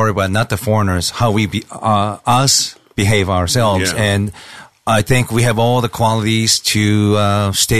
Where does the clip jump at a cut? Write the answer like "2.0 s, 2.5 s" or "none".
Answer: none